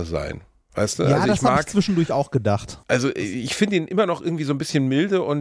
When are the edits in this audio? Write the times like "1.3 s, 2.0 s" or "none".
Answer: 2.8 s